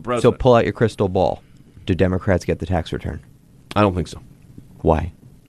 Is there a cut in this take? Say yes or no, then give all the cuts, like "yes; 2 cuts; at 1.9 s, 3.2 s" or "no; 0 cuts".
no; 0 cuts